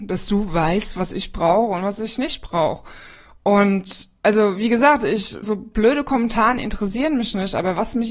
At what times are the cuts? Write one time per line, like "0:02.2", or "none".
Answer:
0:04.2
0:05.4